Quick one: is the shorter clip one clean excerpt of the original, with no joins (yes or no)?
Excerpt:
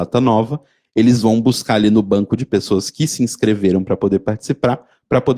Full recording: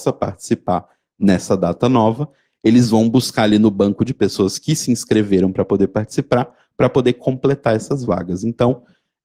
yes